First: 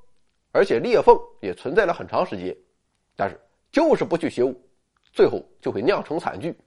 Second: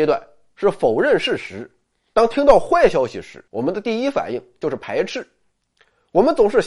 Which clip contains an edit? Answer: second; 2 cuts; at 2.1 s, 3.5 s

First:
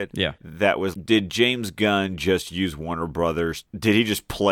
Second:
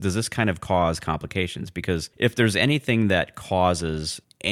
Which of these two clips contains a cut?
first; 1 cut; at 0.9 s

